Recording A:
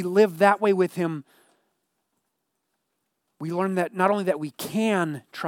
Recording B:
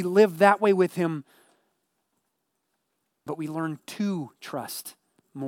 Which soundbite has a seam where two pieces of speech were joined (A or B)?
B